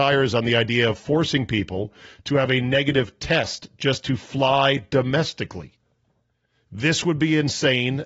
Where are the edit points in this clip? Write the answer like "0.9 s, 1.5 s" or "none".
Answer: none